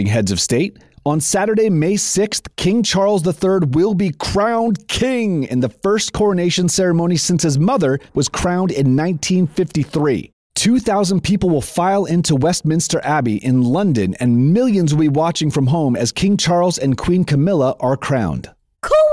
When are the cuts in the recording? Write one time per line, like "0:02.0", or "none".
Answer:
0:08.1